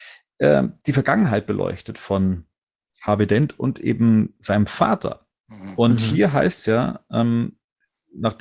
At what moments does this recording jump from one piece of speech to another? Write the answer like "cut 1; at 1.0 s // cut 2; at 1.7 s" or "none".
none